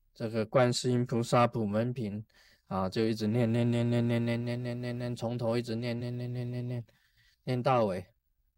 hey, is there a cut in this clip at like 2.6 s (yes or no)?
no